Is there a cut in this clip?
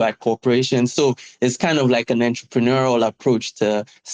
no; 0 cuts

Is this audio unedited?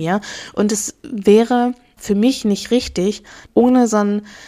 no; 2 cuts; at 2.0 s, 3.5 s

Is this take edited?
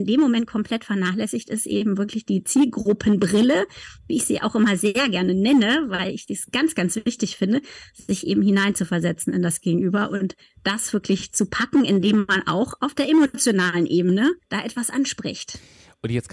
yes; 1 cut; at 14.4 s

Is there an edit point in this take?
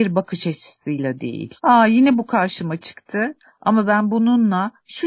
yes; 1 cut; at 1.6 s

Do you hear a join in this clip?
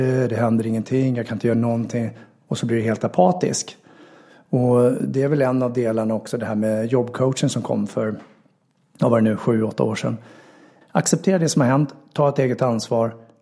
yes; 1 cut; at 10.8 s

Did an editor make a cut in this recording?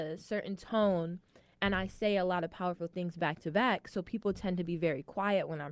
no; 0 cuts

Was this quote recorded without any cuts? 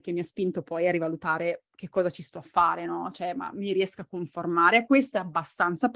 yes; 0 cuts

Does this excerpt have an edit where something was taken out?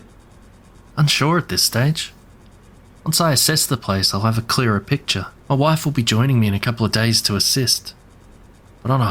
yes; 1 cut; at 5.4 s

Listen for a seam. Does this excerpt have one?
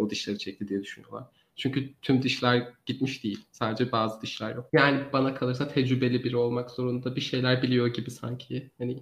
yes; 1 cut; at 4.7 s

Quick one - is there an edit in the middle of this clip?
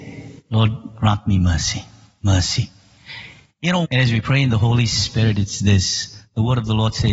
yes; 1 cut; at 3.8 s

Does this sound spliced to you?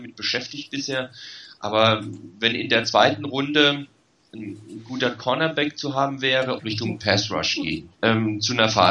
yes; 2 cuts; at 6.6 s, 7.9 s

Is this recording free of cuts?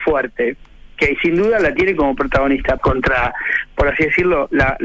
no; 1 cut; at 2.8 s

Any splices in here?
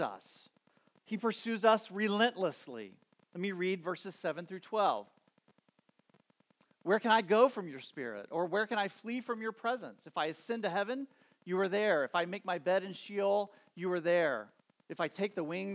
no; 0 cuts

